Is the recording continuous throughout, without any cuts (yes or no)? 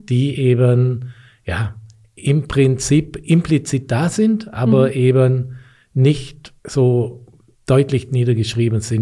no